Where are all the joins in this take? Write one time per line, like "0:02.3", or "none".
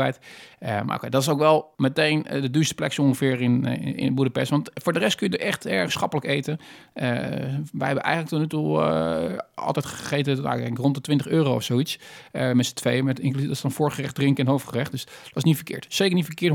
0:01.7